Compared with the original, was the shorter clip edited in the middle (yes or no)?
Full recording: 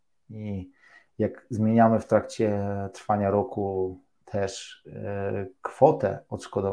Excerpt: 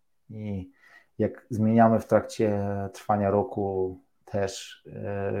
no